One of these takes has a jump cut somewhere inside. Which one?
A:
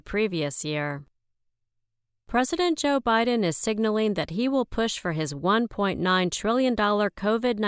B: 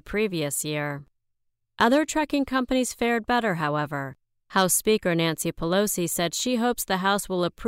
B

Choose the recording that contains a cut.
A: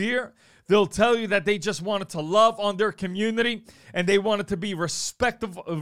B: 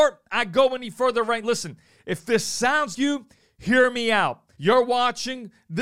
B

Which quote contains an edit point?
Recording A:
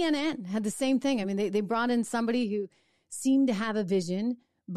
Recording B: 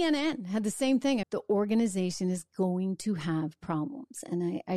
B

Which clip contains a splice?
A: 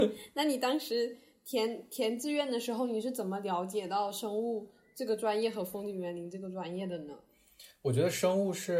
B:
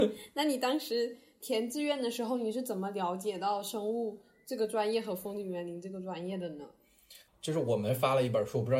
B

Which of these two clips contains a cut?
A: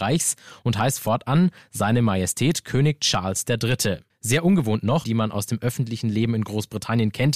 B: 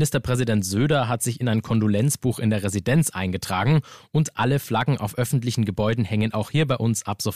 A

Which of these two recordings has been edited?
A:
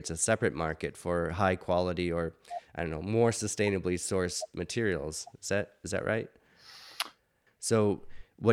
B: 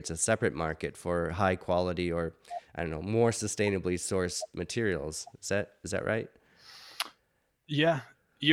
A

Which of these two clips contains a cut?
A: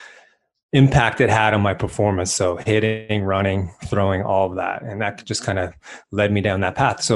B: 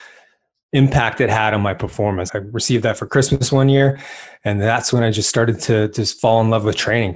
B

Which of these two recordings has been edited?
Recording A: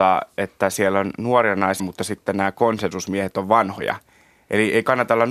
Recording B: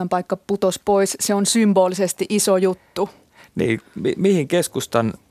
A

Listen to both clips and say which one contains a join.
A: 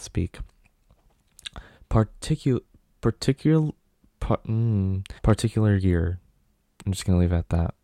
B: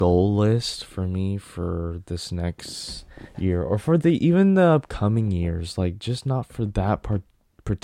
A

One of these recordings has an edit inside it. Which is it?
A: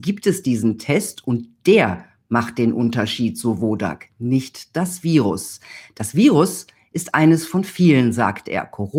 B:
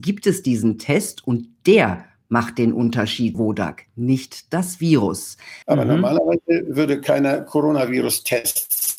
B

